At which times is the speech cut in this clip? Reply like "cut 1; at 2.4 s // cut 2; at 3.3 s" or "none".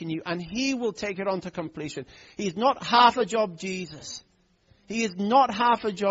none

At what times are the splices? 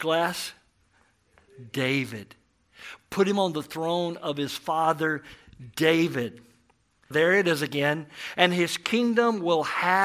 cut 1; at 7.1 s

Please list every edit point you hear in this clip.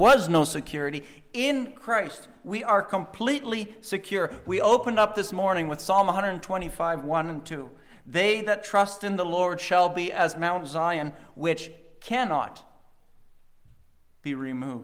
none

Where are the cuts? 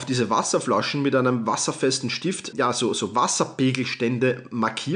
cut 1; at 2.5 s

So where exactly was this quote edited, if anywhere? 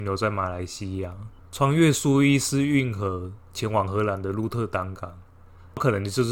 cut 1; at 1.4 s

